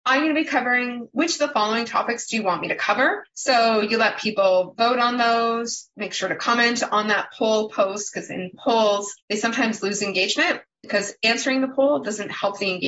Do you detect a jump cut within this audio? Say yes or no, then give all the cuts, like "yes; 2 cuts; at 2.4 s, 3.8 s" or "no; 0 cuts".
yes; 3 cuts; at 3.3 s, 9.2 s, 10.7 s